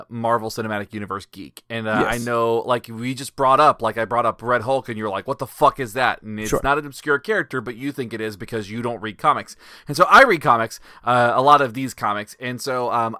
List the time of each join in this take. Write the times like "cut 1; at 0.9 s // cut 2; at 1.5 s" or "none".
none